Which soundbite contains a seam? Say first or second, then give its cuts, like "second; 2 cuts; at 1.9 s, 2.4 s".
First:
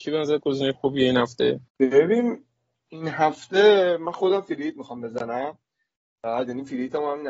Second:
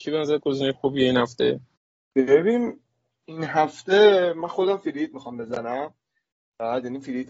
first; 1 cut; at 1.7 s